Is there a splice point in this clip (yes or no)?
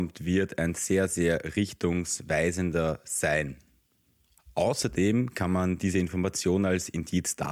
no